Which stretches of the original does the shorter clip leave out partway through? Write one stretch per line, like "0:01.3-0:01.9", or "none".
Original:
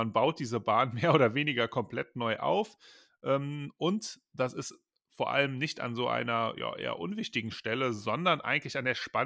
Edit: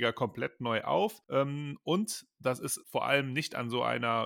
0:02.8-0:03.2
0:04.8-0:05.1